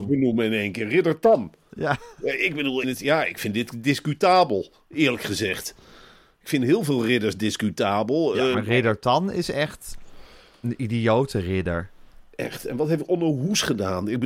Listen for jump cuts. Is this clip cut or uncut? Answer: cut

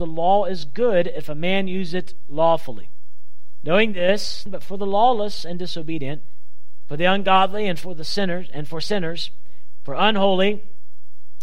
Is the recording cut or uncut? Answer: cut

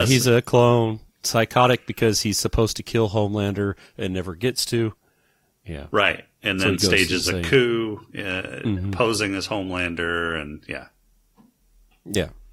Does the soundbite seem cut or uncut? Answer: uncut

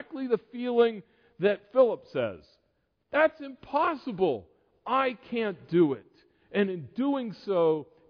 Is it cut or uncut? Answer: uncut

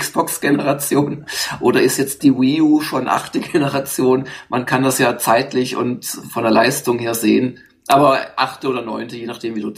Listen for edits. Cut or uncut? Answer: uncut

